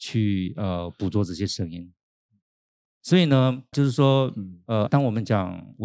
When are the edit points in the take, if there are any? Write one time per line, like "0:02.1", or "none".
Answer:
0:03.7
0:04.9